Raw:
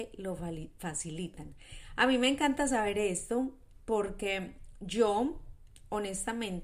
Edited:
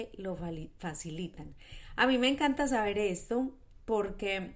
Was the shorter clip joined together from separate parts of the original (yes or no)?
no